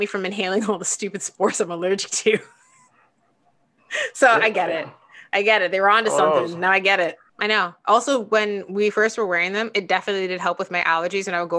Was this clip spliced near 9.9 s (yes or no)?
no